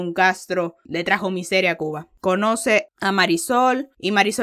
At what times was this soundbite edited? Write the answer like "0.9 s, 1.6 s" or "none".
2.9 s